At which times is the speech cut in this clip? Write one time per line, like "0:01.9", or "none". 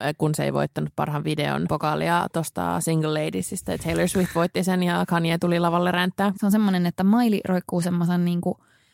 0:01.7
0:06.3